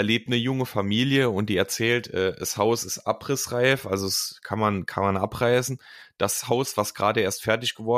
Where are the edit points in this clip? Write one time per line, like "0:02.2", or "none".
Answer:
none